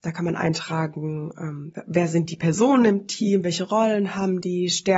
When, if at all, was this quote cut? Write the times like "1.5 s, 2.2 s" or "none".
none